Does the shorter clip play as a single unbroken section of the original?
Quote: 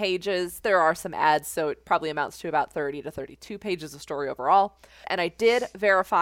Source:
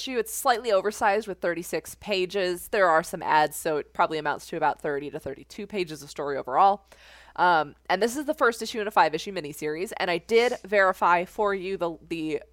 no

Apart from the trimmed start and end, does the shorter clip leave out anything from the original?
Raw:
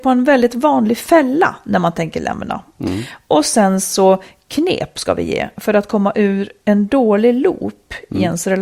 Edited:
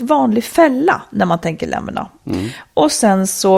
no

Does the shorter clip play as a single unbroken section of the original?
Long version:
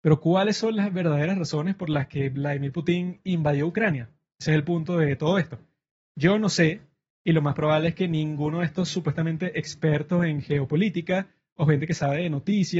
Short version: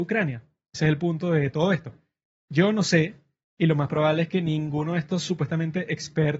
yes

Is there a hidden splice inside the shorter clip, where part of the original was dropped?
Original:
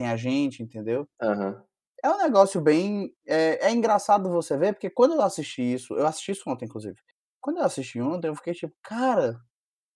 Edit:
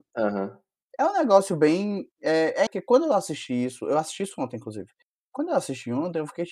yes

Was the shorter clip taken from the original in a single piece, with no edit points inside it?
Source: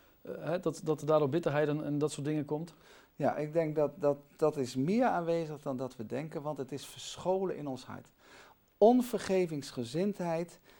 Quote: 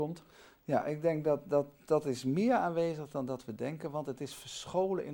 yes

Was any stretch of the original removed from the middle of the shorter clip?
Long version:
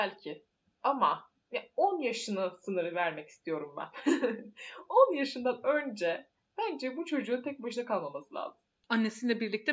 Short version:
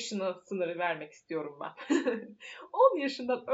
no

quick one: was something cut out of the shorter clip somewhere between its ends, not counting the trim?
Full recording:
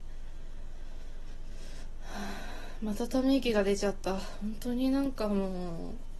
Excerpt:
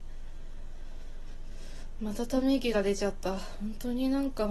yes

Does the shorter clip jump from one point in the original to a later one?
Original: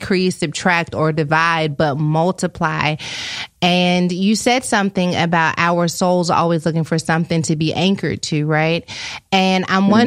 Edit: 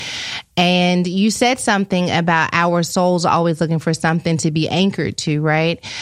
no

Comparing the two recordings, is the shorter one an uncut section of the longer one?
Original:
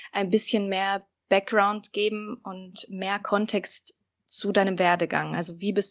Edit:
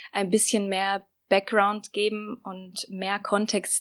yes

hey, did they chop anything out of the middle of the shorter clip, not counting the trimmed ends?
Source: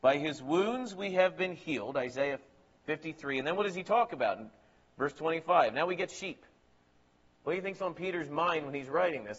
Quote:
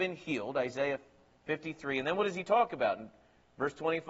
no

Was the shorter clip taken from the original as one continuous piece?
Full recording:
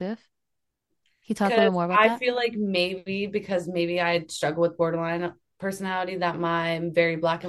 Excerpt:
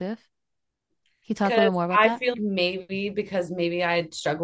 no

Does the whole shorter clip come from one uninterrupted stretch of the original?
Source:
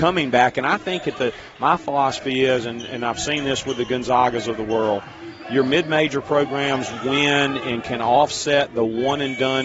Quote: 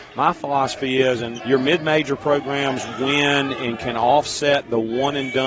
no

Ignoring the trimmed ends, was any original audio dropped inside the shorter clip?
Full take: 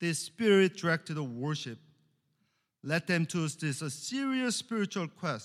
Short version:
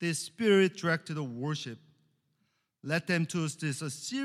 no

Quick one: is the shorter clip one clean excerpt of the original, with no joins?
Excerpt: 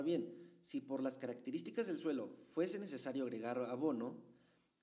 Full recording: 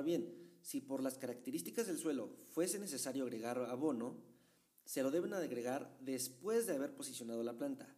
yes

